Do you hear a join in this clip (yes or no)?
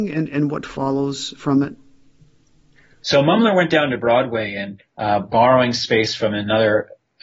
yes